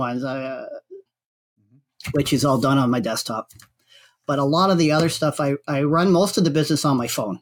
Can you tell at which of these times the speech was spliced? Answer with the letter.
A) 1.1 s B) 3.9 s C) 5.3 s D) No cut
A